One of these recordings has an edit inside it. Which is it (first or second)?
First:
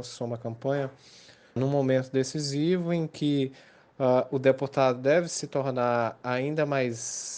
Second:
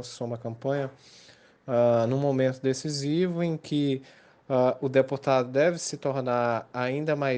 first